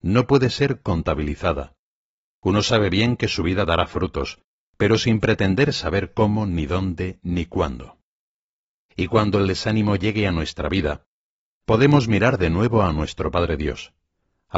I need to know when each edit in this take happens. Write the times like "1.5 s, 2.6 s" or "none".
none